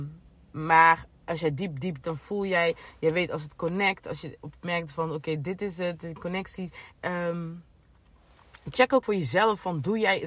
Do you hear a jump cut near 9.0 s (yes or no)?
yes